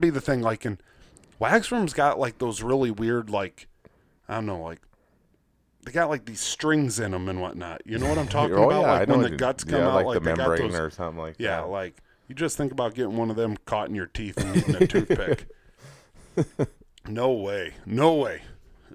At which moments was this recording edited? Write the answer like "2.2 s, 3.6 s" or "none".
none